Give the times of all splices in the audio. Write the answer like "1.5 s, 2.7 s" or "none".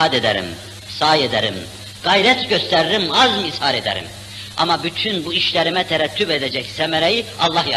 none